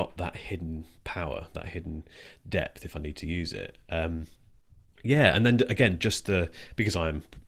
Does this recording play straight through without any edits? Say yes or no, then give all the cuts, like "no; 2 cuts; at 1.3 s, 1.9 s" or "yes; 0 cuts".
yes; 0 cuts